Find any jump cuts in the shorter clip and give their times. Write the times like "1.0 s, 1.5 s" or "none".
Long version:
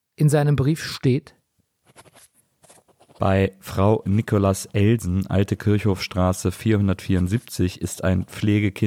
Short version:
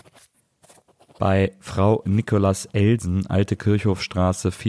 none